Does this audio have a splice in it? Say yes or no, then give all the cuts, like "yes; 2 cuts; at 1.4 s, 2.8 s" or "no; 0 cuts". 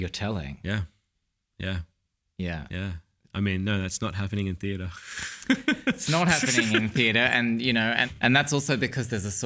no; 0 cuts